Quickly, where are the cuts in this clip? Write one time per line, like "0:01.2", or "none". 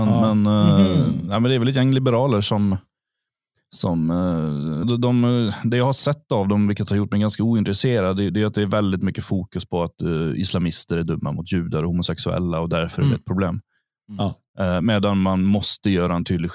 0:04.8

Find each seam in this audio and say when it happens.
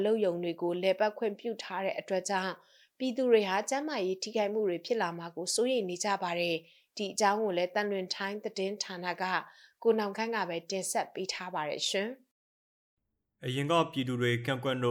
none

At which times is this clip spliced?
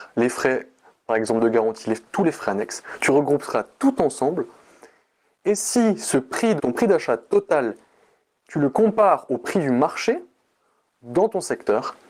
0:06.6

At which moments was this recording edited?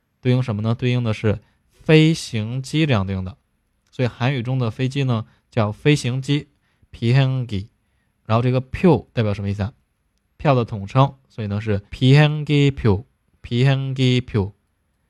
0:10.3
0:11.9

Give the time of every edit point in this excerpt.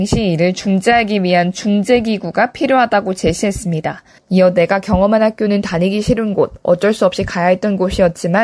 0:04.2

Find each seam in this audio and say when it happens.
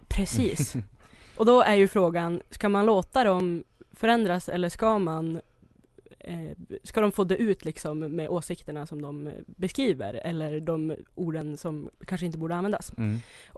none

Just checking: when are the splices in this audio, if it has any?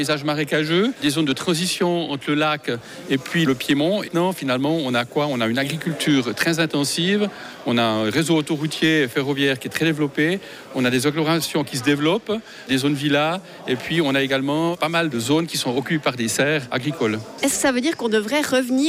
0:04.1

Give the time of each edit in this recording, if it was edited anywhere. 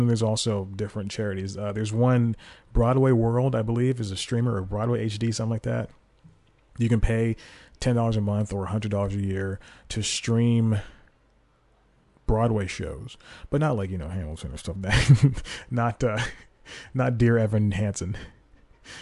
0:14.8

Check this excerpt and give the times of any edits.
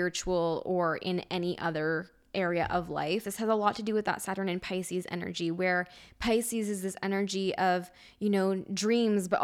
0:03.2

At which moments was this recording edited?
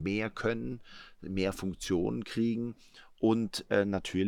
none

